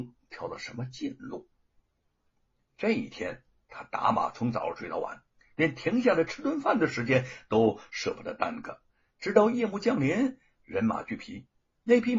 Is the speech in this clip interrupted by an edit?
no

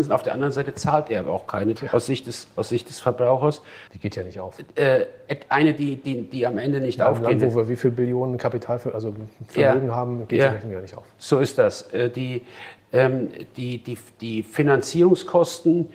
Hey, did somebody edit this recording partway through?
yes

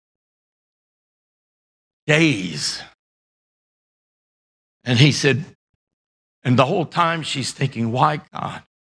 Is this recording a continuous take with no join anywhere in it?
yes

